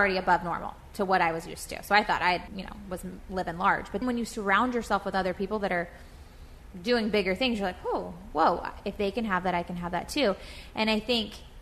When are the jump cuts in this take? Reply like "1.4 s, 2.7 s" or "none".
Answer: 2.5 s, 4.0 s